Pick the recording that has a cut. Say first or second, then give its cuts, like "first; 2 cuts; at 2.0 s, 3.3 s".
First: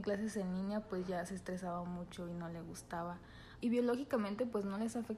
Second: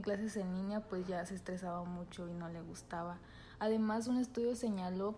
first; 1 cut; at 3.6 s